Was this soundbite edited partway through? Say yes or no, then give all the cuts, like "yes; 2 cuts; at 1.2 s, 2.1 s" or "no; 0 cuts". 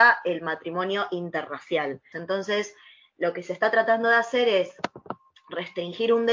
yes; 1 cut; at 2.1 s